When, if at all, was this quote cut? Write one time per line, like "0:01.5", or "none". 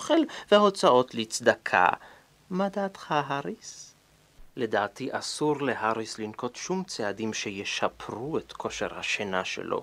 0:04.5